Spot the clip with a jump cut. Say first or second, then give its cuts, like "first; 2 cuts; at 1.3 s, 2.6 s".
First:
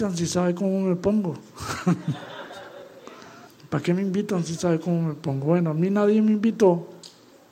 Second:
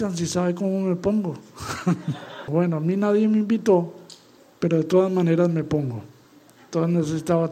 second; 1 cut; at 2.5 s